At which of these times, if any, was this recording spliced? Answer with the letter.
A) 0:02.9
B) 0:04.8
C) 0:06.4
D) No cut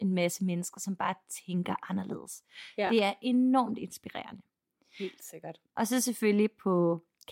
D